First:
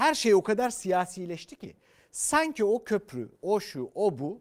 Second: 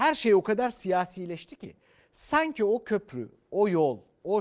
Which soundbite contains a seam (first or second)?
first